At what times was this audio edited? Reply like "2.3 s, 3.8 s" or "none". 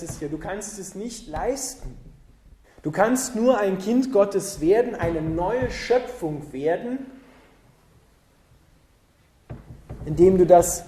2.6 s